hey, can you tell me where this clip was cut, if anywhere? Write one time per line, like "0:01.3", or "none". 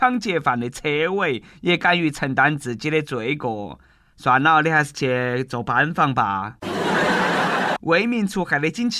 0:07.8